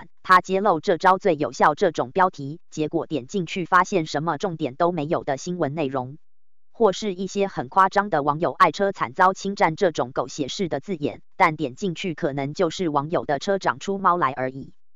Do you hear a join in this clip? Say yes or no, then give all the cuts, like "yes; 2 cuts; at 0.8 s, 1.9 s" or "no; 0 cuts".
yes; 1 cut; at 14.0 s